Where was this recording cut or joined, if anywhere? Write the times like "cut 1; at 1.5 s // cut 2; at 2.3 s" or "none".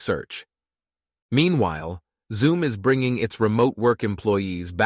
cut 1; at 1.2 s